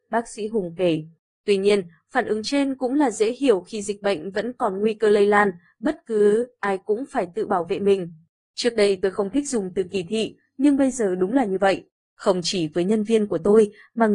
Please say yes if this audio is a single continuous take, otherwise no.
yes